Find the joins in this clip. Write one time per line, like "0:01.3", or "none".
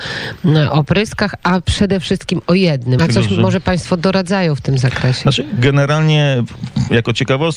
0:03.0